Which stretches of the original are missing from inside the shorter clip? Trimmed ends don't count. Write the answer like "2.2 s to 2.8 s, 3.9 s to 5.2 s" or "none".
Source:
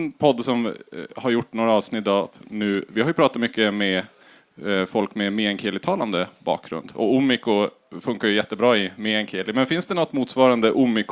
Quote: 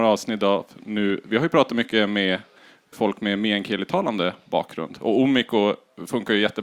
4.6 s to 4.9 s